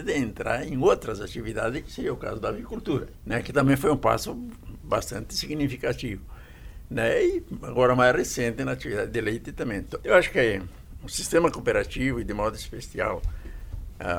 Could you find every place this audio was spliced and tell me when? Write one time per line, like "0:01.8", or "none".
0:10.0